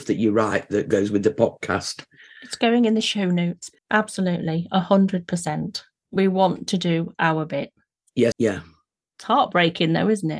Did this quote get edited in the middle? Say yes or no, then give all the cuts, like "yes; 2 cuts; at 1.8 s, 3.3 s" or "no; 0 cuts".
yes; 2 cuts; at 3.8 s, 8.3 s